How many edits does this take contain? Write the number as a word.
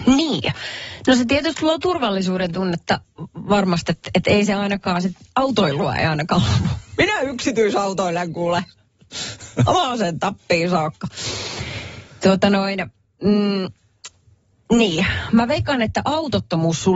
zero